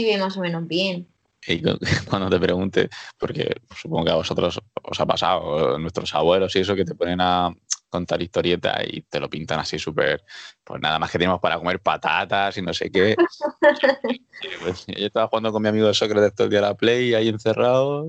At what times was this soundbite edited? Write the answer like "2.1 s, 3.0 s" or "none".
9.0 s